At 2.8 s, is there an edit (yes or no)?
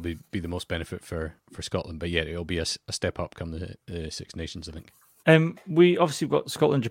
no